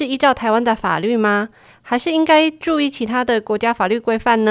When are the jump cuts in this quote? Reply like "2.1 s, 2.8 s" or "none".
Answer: none